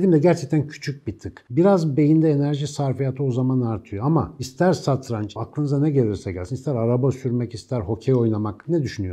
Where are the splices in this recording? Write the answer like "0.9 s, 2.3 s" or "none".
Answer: 5.4 s

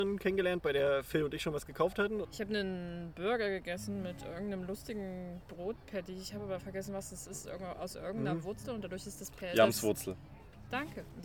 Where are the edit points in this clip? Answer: 2.2 s

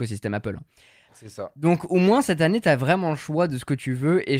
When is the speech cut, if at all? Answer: 1.1 s

